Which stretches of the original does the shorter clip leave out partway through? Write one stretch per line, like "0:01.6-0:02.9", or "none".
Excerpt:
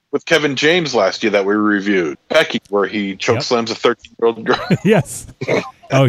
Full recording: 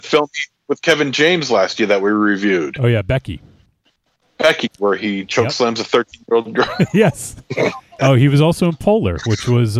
0:02.7-0:04.2